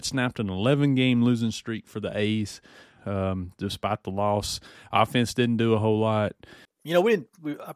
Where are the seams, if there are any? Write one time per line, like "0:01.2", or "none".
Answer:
0:03.0
0:06.6